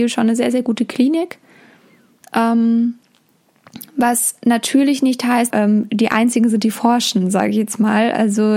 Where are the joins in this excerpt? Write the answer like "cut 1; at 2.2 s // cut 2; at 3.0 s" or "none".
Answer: cut 1; at 5.5 s